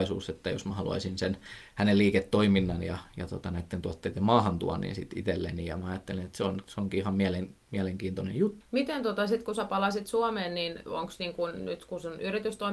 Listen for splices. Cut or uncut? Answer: cut